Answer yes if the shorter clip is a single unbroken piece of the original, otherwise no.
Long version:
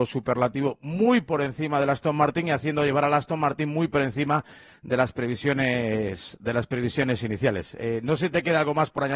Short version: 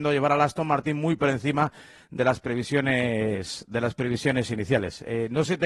yes